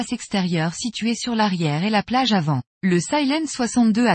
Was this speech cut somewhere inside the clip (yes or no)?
yes